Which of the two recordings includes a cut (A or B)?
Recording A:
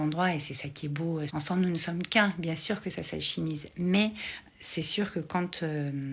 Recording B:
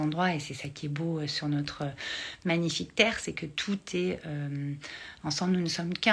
A